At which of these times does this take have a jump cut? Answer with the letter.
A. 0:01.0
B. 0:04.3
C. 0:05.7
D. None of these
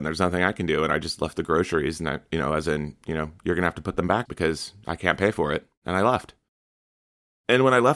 B